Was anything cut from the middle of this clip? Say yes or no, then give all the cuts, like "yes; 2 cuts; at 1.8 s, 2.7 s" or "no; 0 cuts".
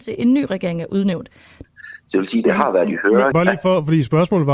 yes; 2 cuts; at 1.6 s, 3.3 s